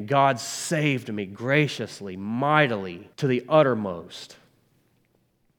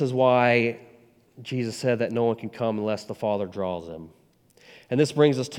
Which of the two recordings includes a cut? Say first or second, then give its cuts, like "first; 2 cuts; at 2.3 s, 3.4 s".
first; 1 cut; at 3.1 s